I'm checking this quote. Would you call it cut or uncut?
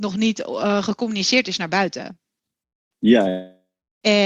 uncut